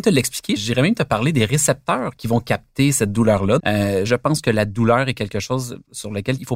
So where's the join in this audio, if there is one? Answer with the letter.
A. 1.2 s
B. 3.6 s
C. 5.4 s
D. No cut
B